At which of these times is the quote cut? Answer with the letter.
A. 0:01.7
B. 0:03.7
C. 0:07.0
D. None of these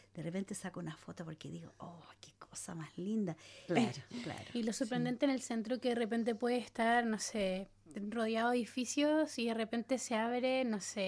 B